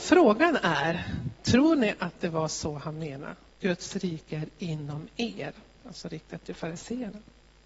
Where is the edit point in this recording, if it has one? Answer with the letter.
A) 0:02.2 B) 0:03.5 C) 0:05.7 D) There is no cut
B